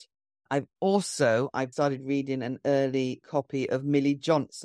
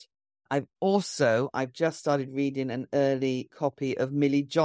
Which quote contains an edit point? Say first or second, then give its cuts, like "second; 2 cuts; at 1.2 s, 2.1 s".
first; 1 cut; at 1.7 s